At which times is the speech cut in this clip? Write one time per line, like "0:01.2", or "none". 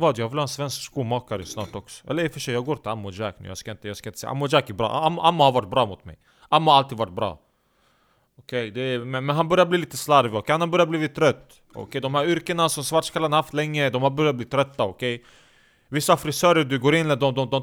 none